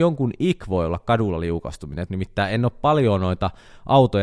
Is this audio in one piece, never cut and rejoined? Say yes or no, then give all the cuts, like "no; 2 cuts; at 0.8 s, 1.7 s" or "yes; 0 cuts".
no; 1 cut; at 2.1 s